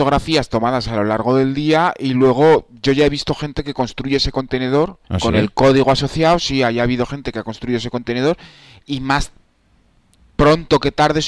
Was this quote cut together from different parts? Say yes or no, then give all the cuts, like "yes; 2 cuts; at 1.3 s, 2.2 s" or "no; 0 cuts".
yes; 1 cut; at 5.0 s